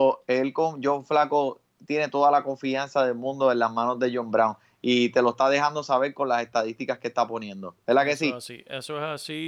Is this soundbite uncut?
yes; 0 cuts

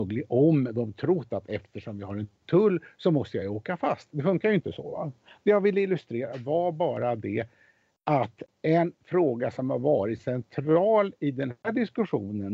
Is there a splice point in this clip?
no; 0 cuts

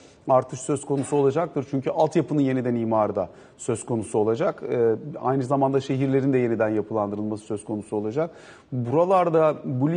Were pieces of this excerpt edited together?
no; 0 cuts

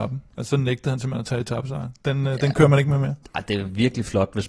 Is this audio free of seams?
yes; 0 cuts

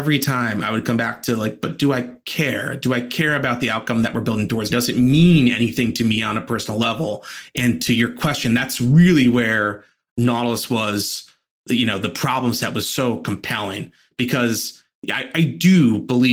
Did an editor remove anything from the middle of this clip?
yes; 1 cut; at 4.7 s

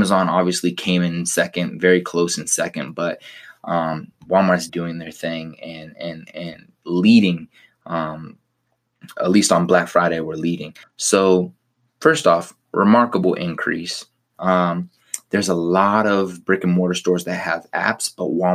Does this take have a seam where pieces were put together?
yes; 3 cuts; at 4.7 s, 10.8 s, 14.3 s

